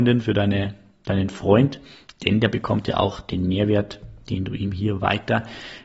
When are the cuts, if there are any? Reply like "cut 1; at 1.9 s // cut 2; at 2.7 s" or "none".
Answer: none